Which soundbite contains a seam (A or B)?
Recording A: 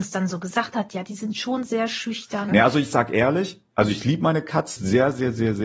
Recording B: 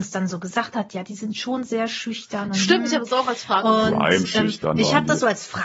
A